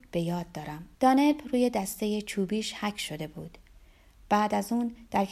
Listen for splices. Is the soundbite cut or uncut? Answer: cut